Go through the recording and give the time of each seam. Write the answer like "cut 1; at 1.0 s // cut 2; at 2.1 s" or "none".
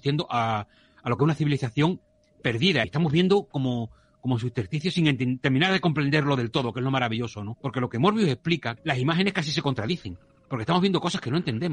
cut 1; at 2.8 s // cut 2; at 7.5 s // cut 3; at 8.8 s